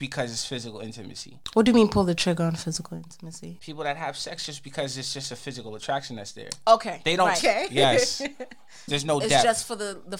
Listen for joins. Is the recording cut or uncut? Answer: cut